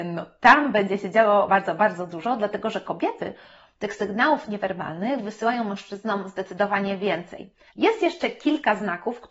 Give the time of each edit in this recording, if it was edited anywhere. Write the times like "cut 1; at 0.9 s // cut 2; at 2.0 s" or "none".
cut 1; at 1.5 s // cut 2; at 7.7 s